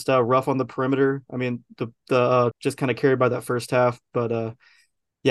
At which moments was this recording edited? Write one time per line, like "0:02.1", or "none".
0:02.5